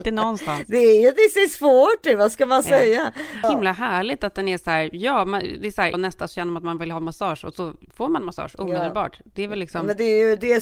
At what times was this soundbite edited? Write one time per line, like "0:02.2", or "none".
0:03.4
0:05.9